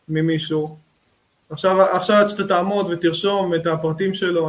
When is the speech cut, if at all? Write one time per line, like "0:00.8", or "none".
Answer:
none